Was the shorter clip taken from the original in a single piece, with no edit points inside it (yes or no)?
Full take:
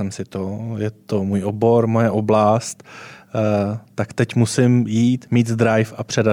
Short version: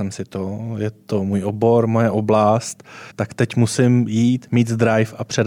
no